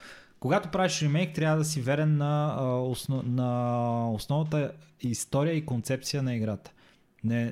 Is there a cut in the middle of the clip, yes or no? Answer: no